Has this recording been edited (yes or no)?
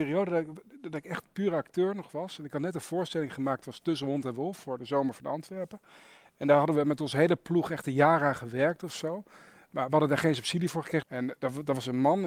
yes